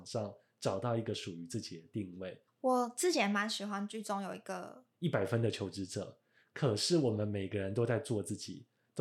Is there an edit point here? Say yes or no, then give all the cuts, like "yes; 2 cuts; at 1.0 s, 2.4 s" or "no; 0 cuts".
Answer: yes; 2 cuts; at 2.5 s, 4.9 s